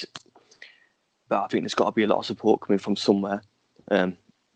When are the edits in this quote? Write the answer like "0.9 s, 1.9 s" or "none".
1.3 s